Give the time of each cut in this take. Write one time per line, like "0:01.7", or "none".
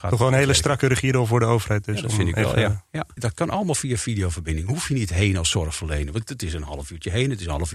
0:03.2